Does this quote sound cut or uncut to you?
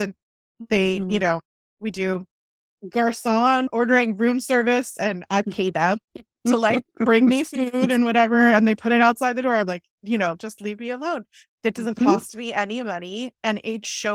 uncut